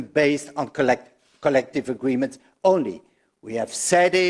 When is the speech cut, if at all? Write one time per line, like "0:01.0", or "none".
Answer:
none